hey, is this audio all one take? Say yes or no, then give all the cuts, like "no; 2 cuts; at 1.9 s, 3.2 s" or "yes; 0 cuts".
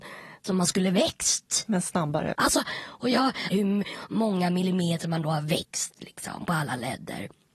no; 2 cuts; at 2.3 s, 3.5 s